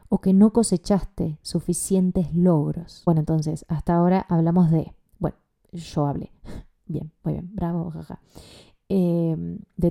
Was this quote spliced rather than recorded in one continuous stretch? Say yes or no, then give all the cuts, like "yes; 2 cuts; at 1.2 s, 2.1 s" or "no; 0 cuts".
no; 0 cuts